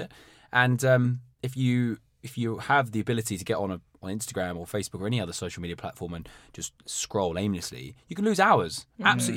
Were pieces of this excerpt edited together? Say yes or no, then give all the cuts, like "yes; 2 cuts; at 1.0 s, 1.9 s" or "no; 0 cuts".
no; 0 cuts